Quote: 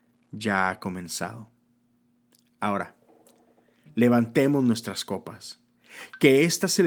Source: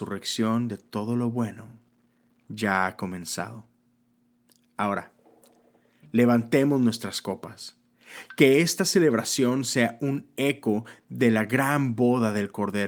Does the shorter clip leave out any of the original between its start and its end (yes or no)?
no